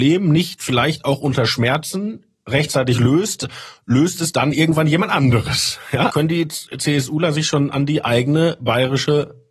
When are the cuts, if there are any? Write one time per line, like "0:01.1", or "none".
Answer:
0:06.1

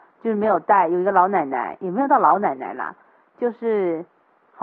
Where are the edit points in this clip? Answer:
none

